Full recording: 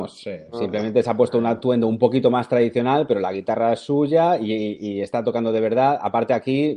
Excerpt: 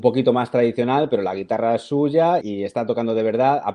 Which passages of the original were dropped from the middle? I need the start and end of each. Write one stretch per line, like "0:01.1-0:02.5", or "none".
0:04.4-0:04.8